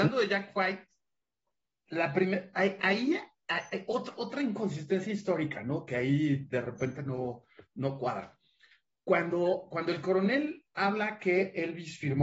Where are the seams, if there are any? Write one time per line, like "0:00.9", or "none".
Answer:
none